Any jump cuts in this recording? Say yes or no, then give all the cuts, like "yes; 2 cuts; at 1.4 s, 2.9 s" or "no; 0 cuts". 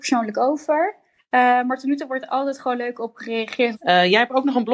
yes; 2 cuts; at 1.2 s, 3.7 s